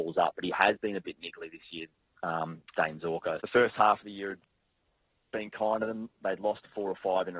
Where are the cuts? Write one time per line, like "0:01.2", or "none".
0:03.4